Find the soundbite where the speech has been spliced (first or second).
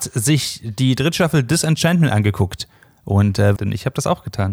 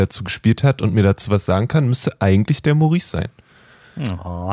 first